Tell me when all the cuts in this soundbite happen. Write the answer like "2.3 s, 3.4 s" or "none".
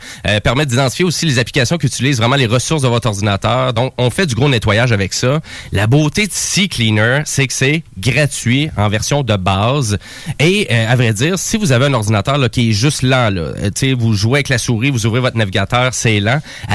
none